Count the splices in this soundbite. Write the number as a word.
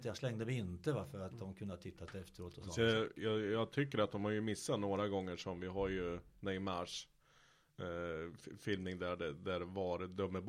zero